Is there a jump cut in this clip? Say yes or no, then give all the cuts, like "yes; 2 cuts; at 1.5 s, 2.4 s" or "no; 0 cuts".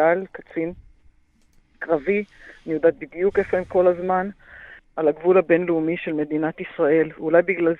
yes; 1 cut; at 4.8 s